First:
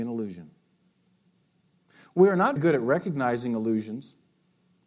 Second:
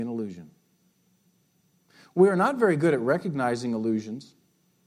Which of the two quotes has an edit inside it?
first; 1 cut; at 2.6 s

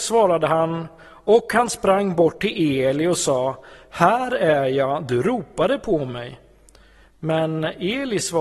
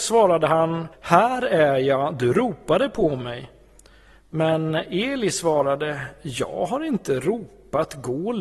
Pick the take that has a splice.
second; 1 cut; at 0.9 s

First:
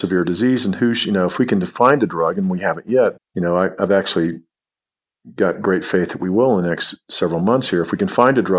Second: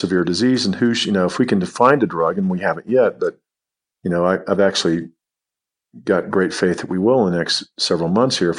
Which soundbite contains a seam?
first; 1 cut; at 3.2 s

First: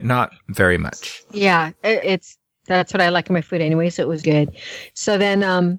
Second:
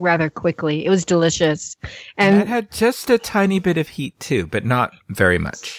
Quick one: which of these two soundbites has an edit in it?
first; 2 cuts; at 2.0 s, 4.2 s

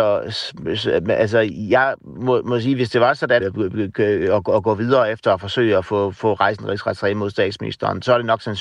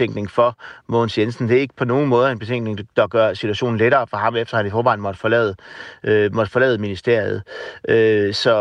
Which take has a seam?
first; 1 cut; at 3.4 s

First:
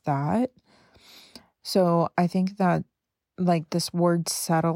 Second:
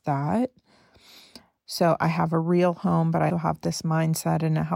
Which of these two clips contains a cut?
second; 2 cuts; at 1.5 s, 3.3 s

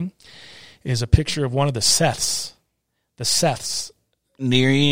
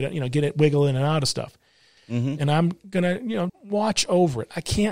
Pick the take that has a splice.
second; 2 cuts; at 2.0 s, 3.5 s

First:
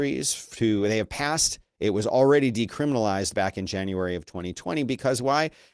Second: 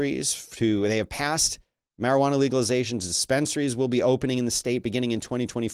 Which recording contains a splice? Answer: first; 1 cut; at 1.7 s

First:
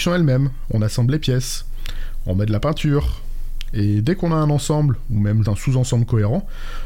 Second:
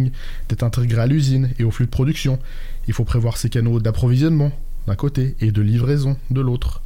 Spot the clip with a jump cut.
first; 1 cut; at 5.4 s

